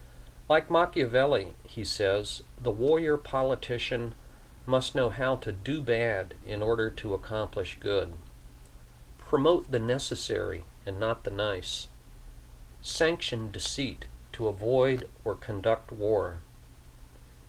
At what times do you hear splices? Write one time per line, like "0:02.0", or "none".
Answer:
none

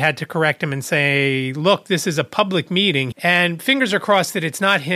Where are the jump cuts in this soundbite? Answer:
0:03.1

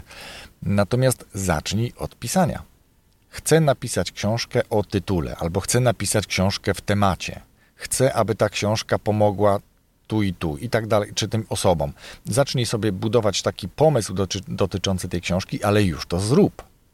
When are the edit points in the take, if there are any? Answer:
none

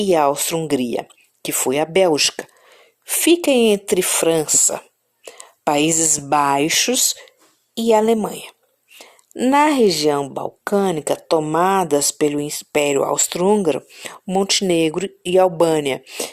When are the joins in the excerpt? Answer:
none

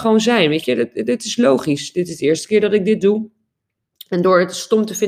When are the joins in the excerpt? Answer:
none

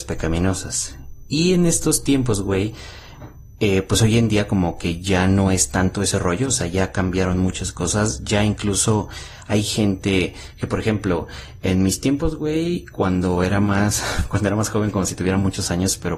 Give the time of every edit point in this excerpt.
none

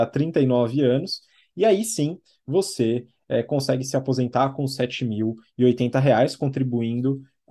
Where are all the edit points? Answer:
none

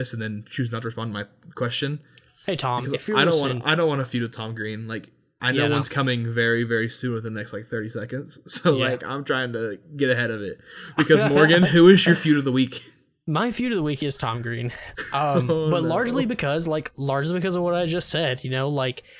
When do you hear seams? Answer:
none

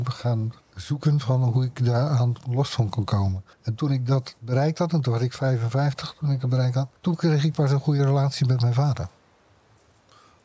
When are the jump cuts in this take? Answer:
0:03.5
0:07.0

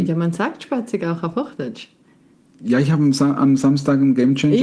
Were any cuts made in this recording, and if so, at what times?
none

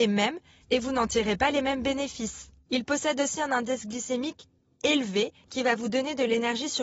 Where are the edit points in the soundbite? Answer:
0:02.7

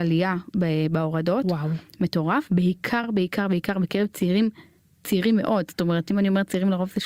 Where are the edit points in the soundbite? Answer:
none

